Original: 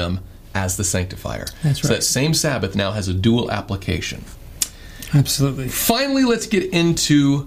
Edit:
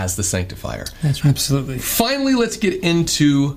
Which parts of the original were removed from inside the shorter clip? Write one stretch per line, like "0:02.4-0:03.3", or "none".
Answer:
0:01.8-0:05.1